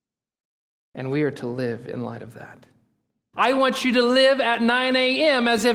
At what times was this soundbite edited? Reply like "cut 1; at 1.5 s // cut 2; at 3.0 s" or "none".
cut 1; at 3.3 s